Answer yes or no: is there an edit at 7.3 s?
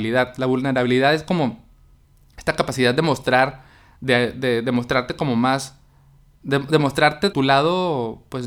yes